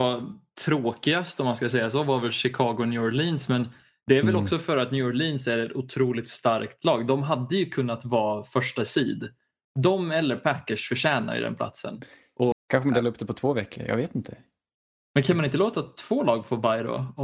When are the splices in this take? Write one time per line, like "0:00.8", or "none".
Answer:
0:12.5